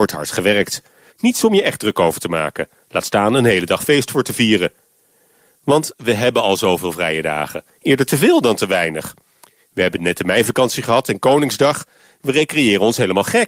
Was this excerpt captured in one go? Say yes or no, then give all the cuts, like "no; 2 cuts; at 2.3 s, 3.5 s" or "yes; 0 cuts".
no; 1 cut; at 1.1 s